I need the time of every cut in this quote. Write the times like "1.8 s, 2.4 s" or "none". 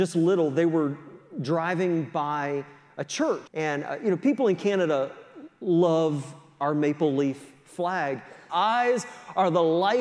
3.5 s, 8.5 s